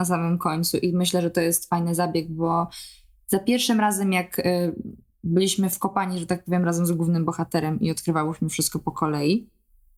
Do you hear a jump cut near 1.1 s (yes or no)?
no